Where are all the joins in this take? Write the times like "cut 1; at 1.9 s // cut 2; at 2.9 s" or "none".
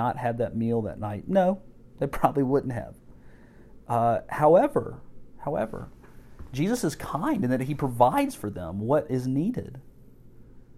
none